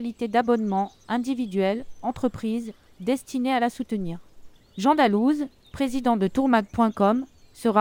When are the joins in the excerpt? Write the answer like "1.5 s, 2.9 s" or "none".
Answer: 2.9 s, 4.6 s